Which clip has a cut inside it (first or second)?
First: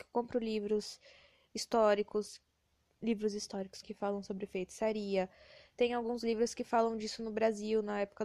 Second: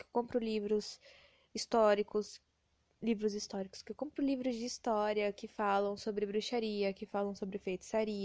first